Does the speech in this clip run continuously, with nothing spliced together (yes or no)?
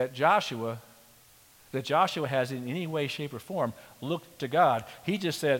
yes